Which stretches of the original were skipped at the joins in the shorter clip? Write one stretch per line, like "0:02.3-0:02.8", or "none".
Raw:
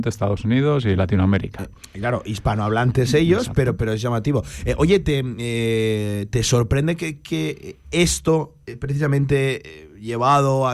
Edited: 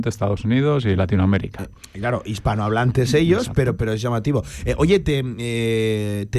none